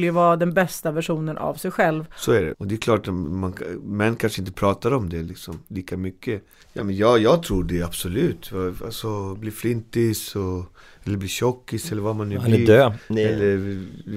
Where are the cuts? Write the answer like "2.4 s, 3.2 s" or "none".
2.5 s, 6.6 s